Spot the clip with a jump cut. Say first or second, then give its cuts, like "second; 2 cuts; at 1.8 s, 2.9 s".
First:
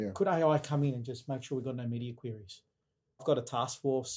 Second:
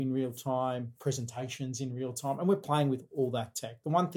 first; 1 cut; at 3.2 s